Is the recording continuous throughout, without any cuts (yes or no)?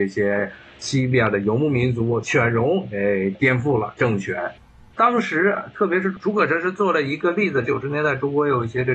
no